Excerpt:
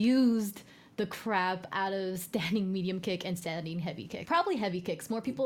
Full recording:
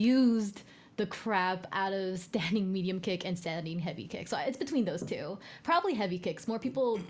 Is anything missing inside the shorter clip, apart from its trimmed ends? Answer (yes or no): yes